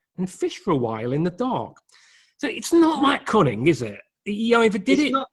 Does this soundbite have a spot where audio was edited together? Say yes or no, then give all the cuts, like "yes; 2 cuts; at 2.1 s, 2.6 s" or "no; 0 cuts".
no; 0 cuts